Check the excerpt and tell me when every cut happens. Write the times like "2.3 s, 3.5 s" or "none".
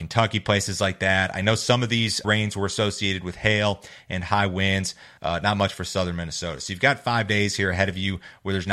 2.2 s, 5.2 s